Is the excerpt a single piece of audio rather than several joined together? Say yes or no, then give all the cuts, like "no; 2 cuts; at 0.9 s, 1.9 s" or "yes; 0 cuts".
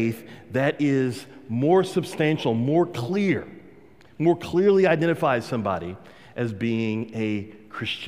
yes; 0 cuts